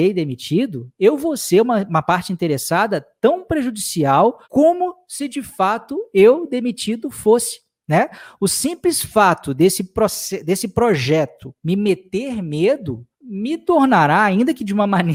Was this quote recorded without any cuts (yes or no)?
no